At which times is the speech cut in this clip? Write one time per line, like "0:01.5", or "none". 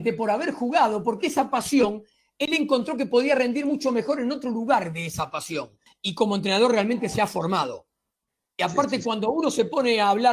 0:05.9